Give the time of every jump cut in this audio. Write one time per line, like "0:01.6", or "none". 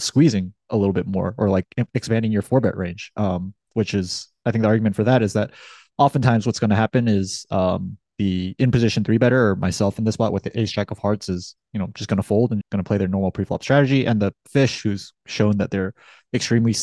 0:12.6